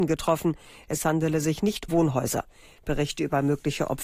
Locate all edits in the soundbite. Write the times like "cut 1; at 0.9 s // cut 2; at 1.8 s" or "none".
cut 1; at 1.9 s